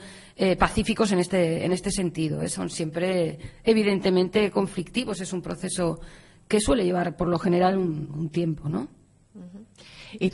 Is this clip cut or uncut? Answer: uncut